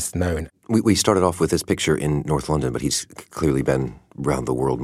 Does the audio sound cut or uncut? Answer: uncut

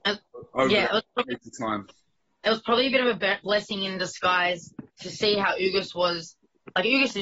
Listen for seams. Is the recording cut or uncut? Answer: uncut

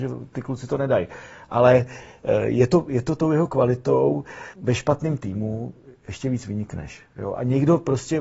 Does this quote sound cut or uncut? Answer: cut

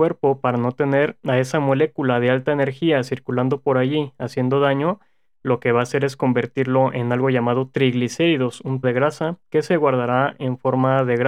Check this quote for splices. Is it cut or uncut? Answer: cut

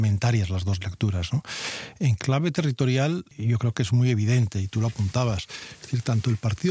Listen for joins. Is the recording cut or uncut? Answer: uncut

